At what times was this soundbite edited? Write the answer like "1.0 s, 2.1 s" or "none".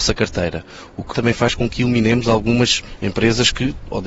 1.1 s